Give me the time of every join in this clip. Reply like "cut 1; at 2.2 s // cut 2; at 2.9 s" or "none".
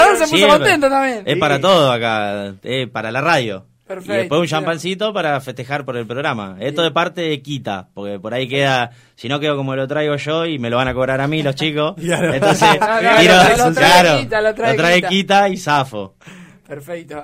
cut 1; at 13.6 s